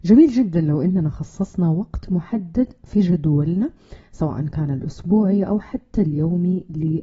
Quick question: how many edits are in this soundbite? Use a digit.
0